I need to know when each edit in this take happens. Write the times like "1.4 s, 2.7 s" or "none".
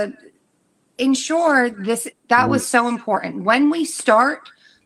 2.1 s